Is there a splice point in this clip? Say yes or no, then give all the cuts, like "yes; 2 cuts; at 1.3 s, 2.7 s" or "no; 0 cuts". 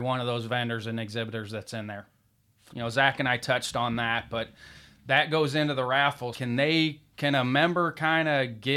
yes; 2 cuts; at 2.7 s, 6.3 s